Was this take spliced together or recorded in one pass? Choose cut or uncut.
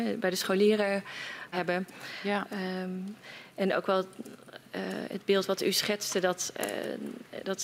cut